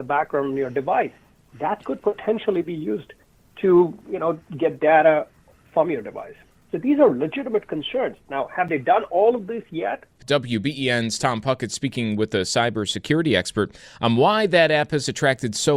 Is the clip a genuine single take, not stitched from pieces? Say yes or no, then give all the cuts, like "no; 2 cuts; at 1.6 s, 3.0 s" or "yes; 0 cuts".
no; 1 cut; at 10.2 s